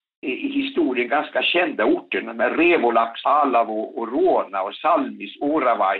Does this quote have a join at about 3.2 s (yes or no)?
yes